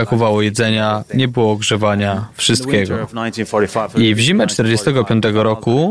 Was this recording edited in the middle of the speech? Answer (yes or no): no